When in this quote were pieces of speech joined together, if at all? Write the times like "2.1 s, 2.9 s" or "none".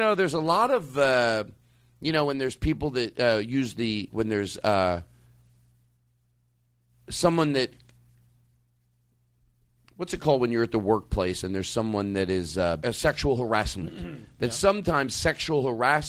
4.1 s, 12.8 s